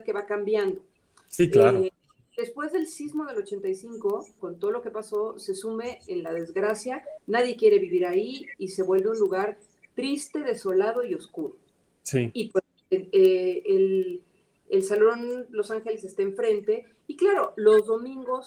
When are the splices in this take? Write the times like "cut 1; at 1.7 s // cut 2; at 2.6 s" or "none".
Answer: cut 1; at 4.4 s